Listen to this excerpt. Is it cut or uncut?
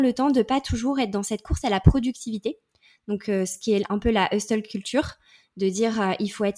uncut